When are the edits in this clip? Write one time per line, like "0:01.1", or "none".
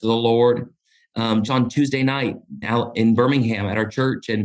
0:01.5
0:02.6